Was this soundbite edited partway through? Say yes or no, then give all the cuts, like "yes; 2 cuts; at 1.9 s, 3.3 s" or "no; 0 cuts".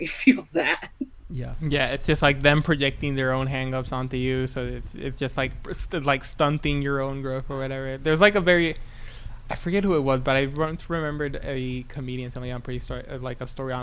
no; 0 cuts